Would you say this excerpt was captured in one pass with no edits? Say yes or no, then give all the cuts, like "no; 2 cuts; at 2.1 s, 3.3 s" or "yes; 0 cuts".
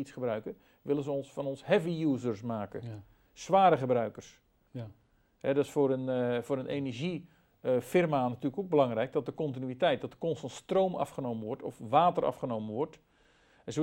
no; 1 cut; at 4.7 s